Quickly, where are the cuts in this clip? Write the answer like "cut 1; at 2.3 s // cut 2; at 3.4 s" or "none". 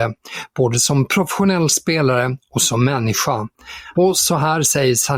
cut 1; at 3.9 s